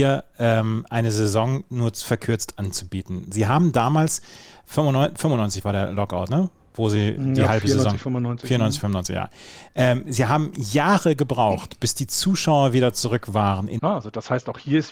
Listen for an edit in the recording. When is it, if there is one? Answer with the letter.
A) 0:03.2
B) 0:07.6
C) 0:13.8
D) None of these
C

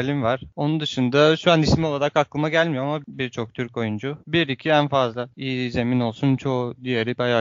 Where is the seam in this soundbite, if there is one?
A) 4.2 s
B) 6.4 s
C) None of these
A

